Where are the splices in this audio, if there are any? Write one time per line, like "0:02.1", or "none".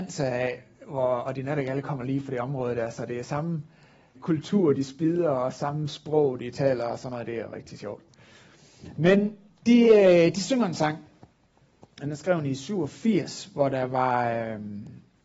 0:04.1